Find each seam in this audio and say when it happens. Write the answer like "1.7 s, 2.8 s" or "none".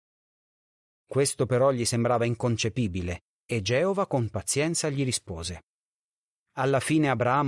3.3 s